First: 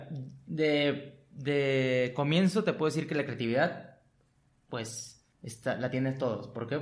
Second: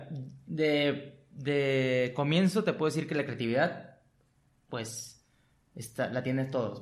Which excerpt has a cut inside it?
first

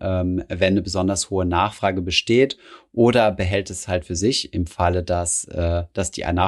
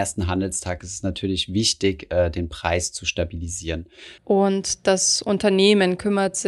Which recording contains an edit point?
second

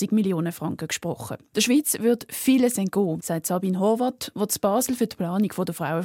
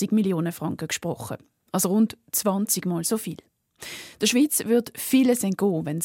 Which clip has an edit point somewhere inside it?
first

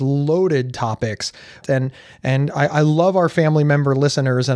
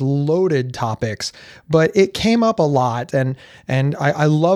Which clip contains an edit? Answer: first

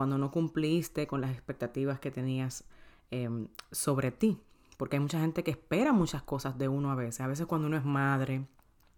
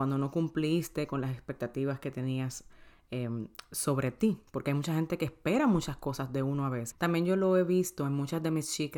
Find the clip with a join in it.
second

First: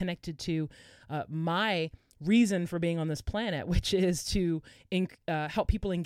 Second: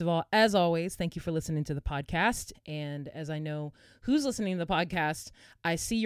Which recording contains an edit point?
second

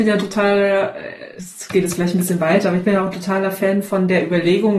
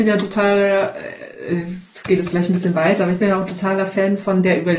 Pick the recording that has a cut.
first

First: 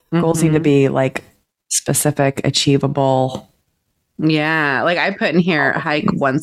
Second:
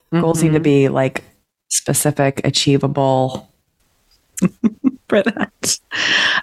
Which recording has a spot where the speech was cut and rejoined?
second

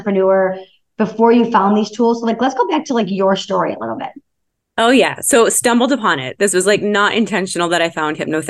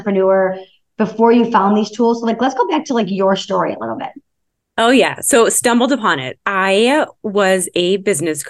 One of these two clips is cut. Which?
second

